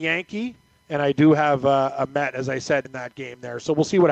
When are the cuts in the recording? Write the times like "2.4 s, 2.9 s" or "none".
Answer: 2.8 s